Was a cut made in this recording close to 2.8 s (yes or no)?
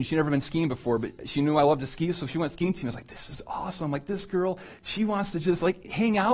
no